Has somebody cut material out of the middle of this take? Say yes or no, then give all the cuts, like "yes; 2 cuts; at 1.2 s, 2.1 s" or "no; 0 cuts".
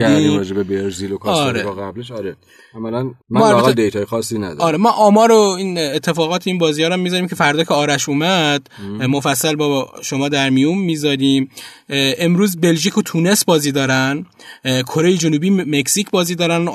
yes; 1 cut; at 3.2 s